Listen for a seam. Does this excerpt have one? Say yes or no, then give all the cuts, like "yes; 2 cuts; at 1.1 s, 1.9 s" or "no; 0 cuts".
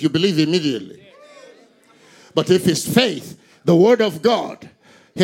no; 0 cuts